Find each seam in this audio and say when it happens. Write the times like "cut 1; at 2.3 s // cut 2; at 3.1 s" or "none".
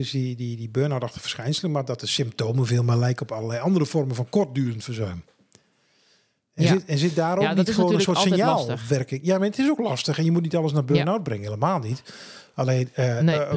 none